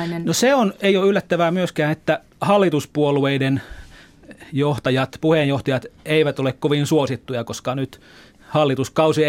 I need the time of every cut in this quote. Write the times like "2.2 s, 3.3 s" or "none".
none